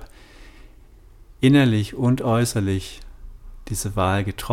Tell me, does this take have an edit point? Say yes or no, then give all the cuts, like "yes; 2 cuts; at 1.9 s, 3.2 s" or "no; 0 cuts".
no; 0 cuts